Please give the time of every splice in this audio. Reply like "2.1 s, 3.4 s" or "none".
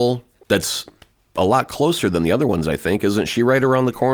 none